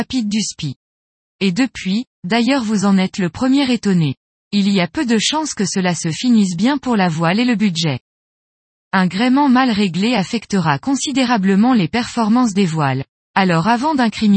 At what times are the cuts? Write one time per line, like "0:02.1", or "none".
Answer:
0:02.1
0:04.3